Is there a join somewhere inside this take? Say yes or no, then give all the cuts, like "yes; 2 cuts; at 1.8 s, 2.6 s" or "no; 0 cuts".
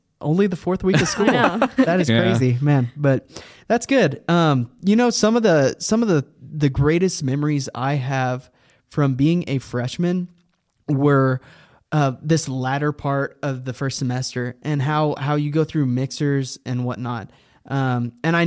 no; 0 cuts